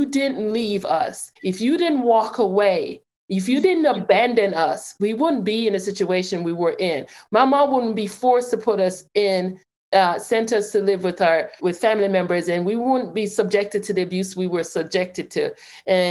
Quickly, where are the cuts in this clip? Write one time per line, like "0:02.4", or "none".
0:01.4
0:11.6

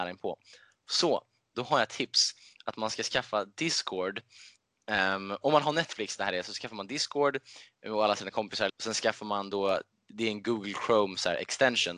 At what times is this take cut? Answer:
0:08.7

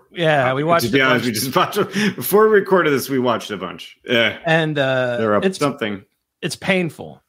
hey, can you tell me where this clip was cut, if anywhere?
0:05.6

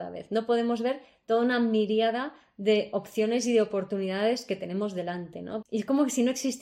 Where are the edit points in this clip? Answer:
0:05.6

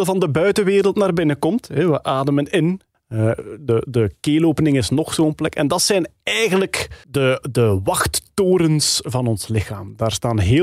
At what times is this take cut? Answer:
0:07.0

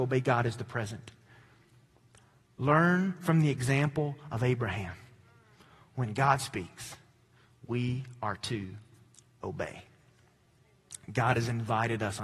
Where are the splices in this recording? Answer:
none

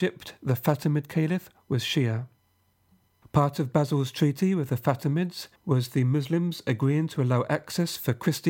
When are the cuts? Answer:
0:03.2
0:05.5

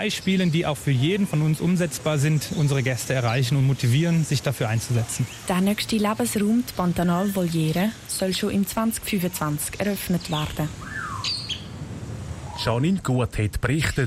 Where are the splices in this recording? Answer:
none

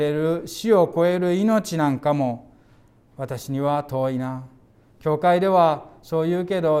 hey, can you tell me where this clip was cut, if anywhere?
none

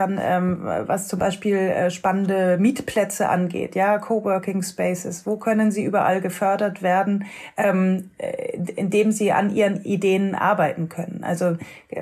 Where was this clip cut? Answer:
none

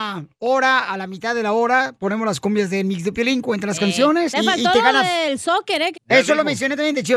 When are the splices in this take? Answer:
0:04.3
0:05.9

